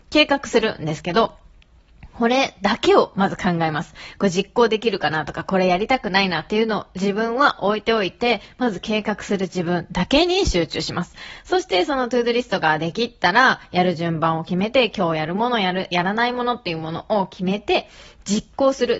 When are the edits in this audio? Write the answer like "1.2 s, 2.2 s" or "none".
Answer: none